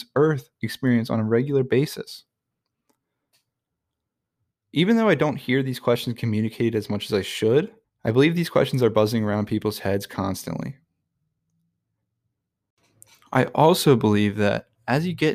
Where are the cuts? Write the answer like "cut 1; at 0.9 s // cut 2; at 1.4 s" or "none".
cut 1; at 4.5 s // cut 2; at 7.8 s